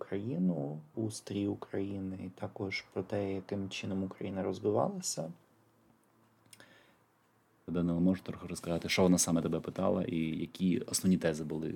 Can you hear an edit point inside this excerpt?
yes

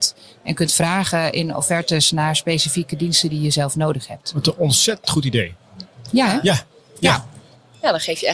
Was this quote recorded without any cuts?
yes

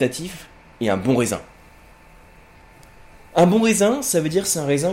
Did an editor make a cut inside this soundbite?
no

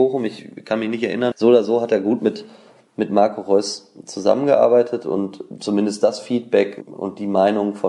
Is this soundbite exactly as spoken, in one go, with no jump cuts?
no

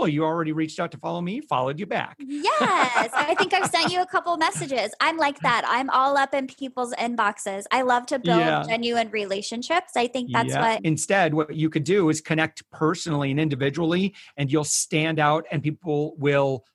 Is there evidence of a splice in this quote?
yes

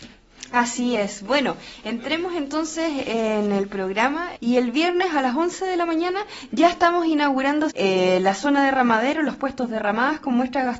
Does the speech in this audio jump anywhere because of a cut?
yes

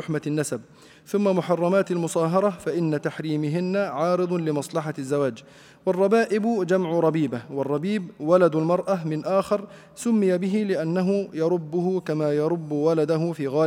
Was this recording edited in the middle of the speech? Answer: no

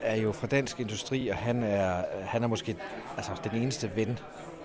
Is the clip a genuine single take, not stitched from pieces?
yes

